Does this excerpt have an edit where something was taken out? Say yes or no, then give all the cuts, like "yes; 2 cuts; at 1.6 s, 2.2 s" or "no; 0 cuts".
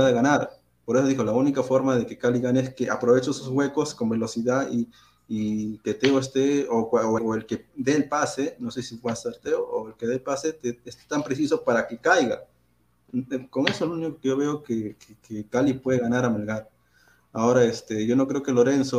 yes; 1 cut; at 7.2 s